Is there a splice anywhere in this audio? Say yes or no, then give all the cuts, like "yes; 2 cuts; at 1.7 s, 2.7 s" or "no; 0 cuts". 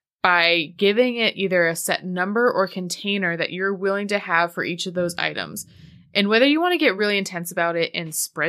no; 0 cuts